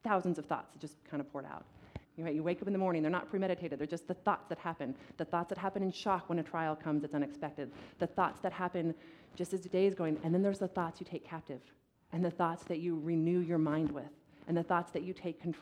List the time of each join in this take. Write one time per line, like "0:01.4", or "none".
0:02.0